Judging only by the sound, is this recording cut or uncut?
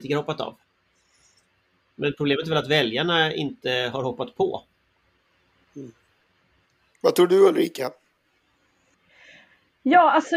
uncut